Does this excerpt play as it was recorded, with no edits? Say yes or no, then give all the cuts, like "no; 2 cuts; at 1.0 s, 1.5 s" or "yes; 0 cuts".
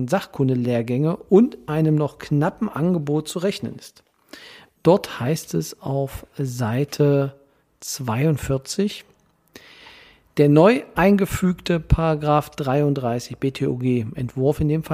no; 1 cut; at 4.8 s